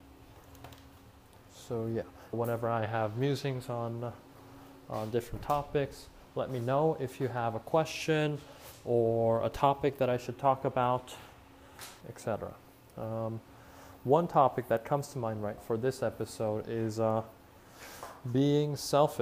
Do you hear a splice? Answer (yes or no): yes